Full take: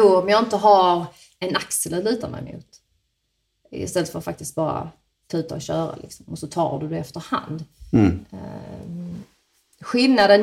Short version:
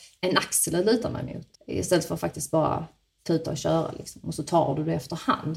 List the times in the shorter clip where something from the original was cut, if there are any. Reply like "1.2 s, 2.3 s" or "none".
1.5 s